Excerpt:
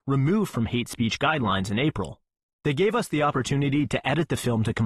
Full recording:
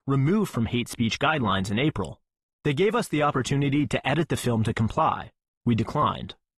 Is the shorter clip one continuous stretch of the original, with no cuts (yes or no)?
yes